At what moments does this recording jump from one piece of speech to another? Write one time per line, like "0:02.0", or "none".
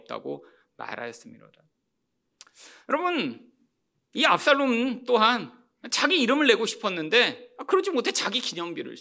none